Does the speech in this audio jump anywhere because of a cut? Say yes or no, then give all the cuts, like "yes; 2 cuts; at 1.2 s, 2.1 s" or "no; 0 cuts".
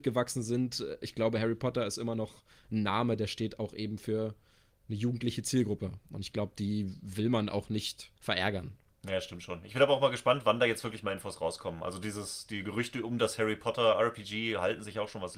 yes; 1 cut; at 8.2 s